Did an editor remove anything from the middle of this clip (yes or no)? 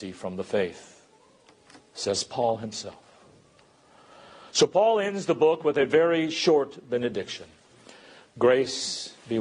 no